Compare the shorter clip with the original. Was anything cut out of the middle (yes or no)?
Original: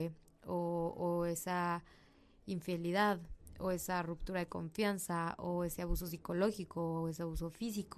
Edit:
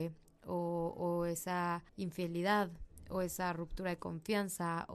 yes